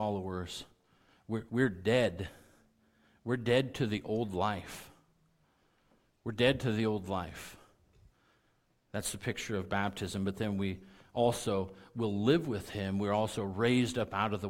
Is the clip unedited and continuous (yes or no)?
no